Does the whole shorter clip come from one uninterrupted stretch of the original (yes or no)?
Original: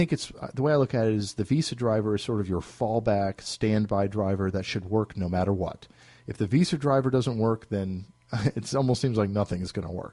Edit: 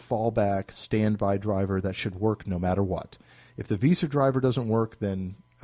yes